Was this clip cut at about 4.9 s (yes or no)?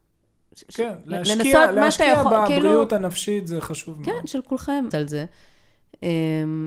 yes